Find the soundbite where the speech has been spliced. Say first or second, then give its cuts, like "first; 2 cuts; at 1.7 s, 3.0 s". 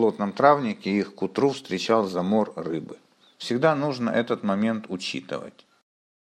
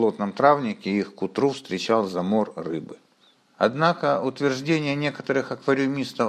second; 1 cut; at 3.4 s